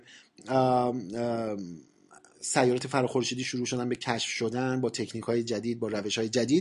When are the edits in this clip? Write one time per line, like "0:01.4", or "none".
none